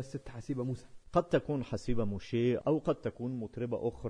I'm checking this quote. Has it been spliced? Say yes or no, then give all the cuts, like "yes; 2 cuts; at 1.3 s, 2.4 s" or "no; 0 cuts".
no; 0 cuts